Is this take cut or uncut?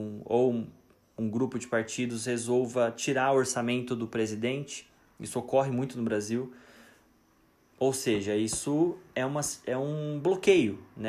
uncut